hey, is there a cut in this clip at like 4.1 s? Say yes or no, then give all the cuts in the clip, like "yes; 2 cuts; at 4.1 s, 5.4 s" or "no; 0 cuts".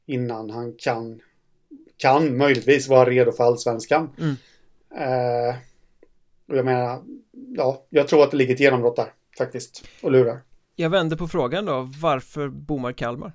no; 0 cuts